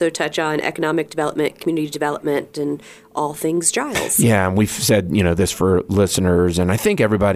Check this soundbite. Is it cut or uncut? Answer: uncut